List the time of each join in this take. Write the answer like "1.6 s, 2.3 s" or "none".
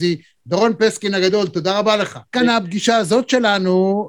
2.3 s